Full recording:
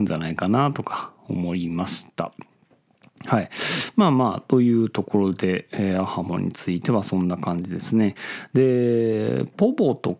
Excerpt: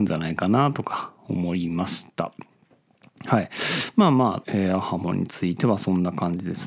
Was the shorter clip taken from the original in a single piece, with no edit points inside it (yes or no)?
no